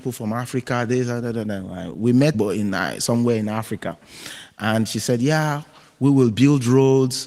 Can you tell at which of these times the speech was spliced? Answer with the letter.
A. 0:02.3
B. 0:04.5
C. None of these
A